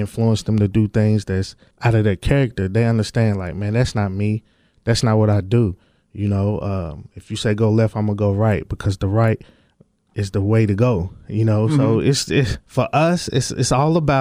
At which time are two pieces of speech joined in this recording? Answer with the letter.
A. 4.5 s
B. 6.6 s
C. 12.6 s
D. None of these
C